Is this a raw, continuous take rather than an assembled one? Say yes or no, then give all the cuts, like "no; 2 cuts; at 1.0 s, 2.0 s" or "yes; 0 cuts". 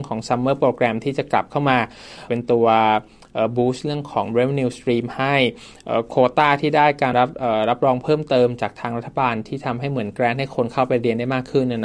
no; 2 cuts; at 2.3 s, 7.1 s